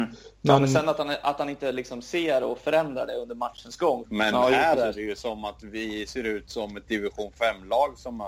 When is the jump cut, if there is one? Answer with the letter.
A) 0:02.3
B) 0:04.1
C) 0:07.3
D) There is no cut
B